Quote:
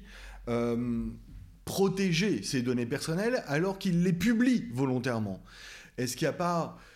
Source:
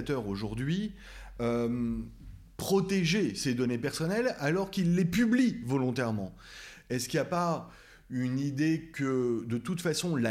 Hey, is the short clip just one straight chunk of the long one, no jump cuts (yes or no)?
yes